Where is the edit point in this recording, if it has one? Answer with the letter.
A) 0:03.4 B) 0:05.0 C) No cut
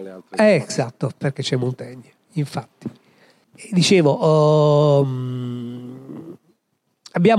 A